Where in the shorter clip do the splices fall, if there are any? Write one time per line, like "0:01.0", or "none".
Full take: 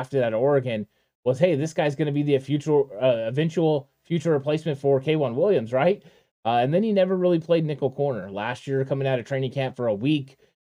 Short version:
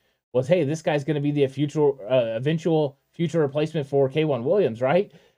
none